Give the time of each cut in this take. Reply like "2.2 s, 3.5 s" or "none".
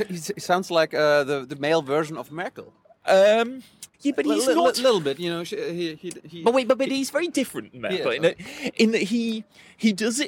3.9 s